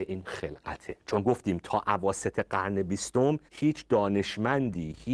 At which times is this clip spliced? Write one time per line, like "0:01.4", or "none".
0:01.0
0:03.5

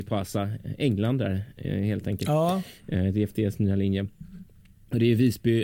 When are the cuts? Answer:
none

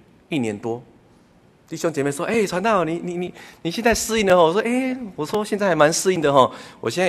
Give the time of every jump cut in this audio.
none

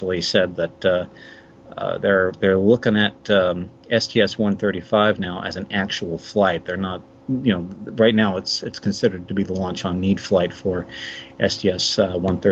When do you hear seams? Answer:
none

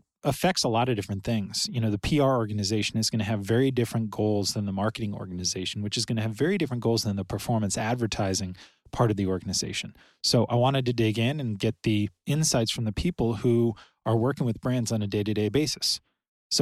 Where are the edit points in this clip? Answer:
none

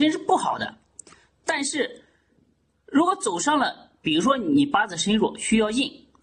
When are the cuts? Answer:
none

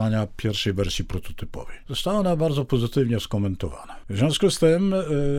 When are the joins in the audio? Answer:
0:04.0

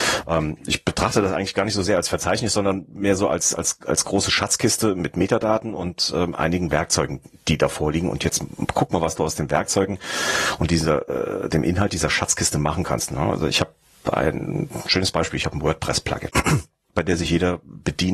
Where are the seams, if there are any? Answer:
0:13.1
0:16.3

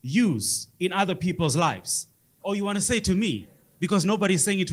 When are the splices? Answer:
0:02.4

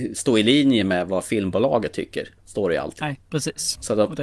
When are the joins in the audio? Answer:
0:02.4

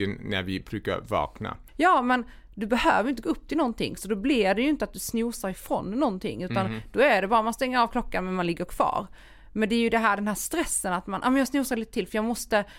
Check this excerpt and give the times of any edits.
0:01.7

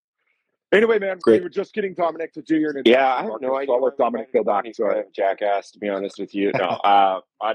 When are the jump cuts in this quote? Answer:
0:01.2

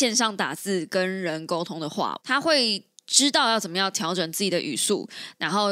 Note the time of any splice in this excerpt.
0:02.2

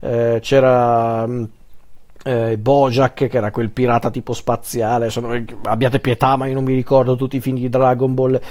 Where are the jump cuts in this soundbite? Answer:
none

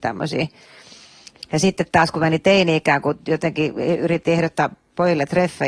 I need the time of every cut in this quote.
0:01.4

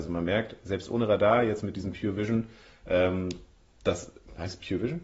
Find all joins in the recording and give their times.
none

